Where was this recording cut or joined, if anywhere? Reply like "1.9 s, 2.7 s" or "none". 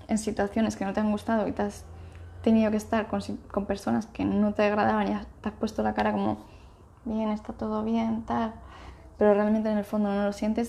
none

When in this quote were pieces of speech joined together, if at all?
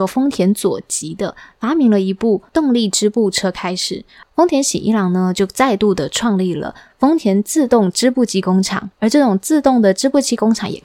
4.2 s

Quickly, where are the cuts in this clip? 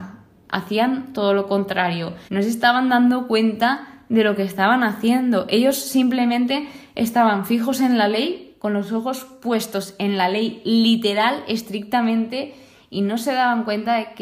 2.3 s

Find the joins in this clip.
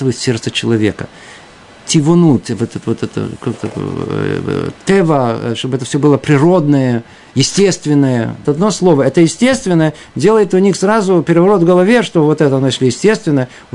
8.4 s

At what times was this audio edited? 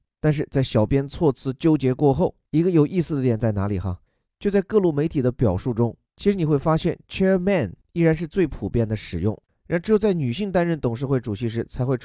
none

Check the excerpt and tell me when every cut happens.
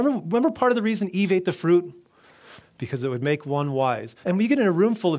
2.6 s, 4.2 s

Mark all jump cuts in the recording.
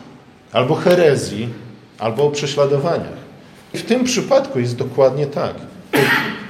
3.7 s

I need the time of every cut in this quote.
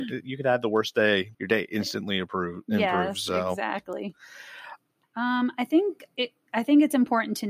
1.3 s, 5.0 s

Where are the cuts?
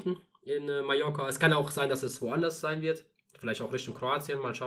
none

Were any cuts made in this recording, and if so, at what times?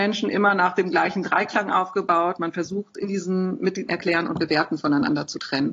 3.9 s

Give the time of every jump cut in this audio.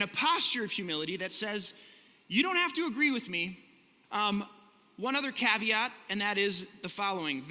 4.0 s

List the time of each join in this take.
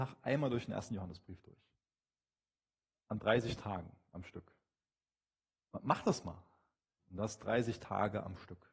7.0 s

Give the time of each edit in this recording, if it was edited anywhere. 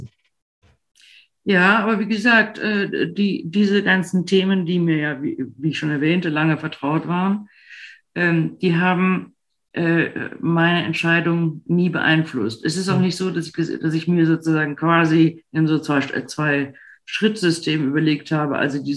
none

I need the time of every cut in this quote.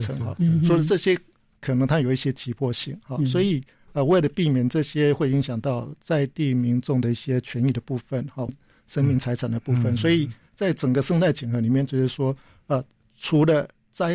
1.6 s, 8.5 s, 11.9 s

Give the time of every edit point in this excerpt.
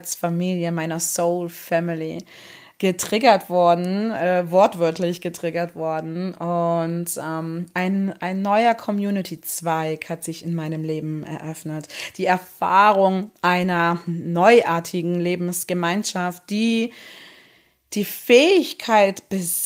none

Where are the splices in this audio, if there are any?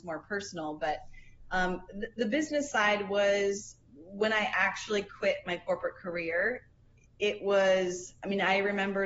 none

